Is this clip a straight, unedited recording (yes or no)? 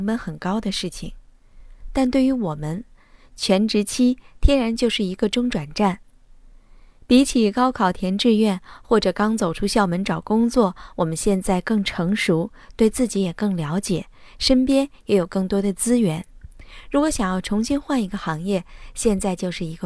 yes